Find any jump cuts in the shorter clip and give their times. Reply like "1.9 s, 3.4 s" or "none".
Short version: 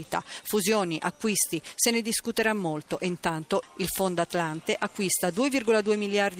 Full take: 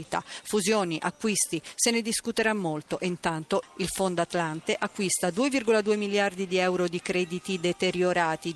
none